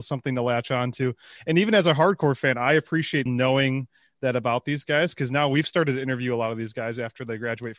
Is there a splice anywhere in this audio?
yes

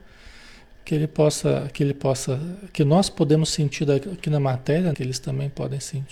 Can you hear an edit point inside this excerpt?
yes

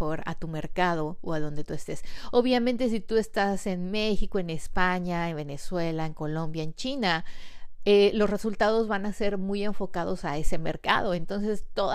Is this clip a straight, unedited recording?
yes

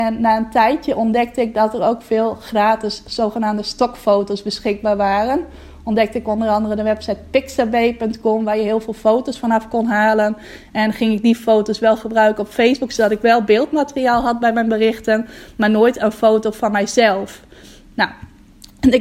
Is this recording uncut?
yes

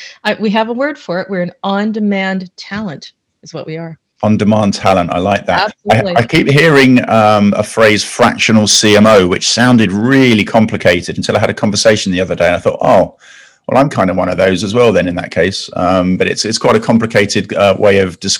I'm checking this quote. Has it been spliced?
no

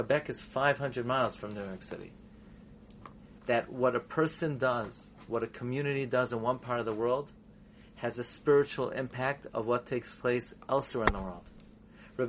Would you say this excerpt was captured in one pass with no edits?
no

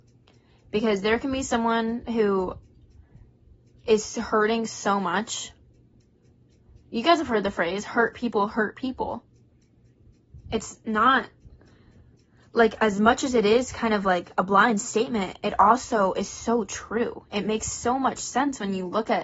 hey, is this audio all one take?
yes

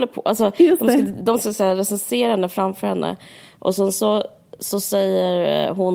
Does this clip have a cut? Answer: no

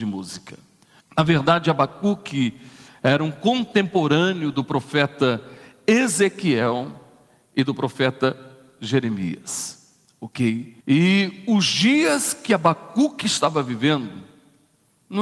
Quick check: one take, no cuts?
no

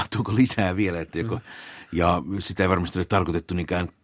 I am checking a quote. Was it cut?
yes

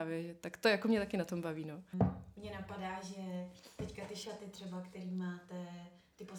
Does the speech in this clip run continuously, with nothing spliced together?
no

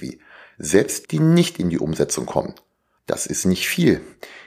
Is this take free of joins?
no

